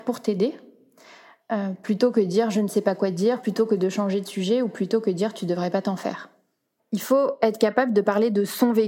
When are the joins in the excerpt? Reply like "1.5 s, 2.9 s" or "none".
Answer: 6.8 s